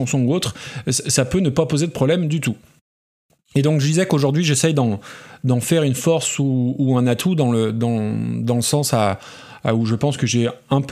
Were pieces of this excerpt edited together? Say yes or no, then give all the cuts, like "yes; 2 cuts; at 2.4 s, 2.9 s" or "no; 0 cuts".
no; 0 cuts